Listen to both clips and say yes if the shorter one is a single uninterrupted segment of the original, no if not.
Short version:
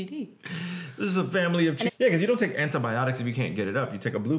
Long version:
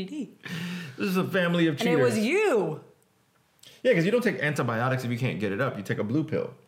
no